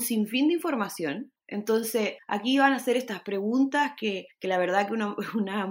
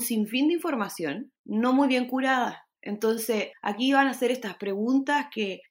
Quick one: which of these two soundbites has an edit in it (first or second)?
first